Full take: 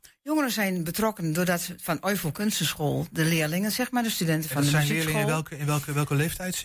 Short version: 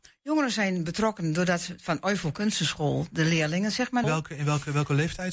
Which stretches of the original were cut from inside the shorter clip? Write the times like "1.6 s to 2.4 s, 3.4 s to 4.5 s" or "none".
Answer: 4.0 s to 5.2 s